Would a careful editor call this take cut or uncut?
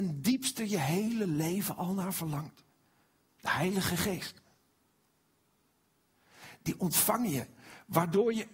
cut